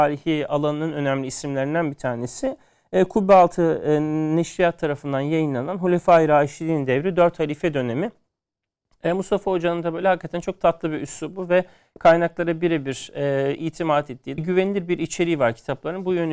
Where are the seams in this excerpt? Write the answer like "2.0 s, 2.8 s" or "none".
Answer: 14.4 s